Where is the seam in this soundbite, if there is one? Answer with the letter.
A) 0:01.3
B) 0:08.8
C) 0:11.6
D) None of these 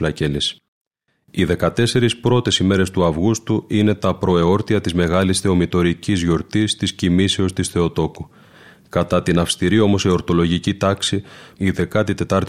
C